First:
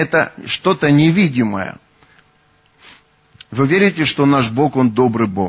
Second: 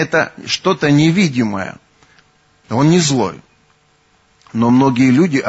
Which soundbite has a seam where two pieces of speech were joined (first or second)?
second